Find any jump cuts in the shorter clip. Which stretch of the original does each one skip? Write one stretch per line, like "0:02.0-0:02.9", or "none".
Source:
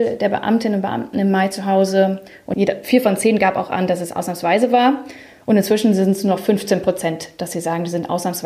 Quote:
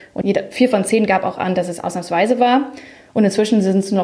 none